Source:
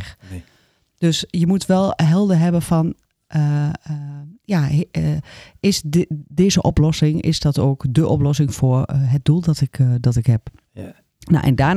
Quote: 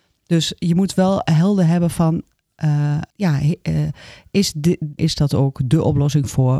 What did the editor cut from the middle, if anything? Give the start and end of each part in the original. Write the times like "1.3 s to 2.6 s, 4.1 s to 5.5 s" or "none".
3.8 s to 4.4 s, 6.3 s to 7.2 s